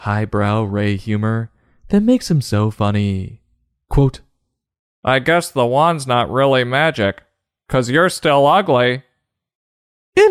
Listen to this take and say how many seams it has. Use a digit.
0